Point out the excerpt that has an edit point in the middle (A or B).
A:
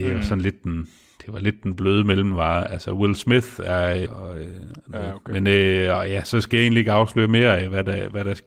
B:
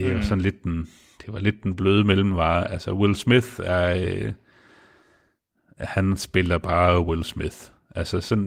A